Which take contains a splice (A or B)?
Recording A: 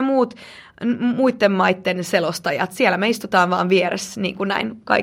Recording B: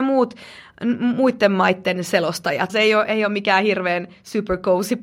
B